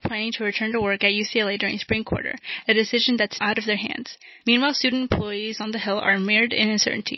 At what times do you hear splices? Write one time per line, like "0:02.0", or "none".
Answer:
0:03.4